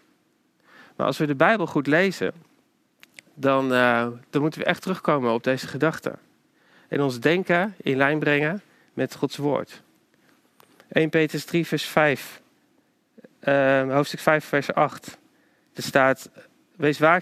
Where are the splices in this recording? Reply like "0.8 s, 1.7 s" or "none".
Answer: none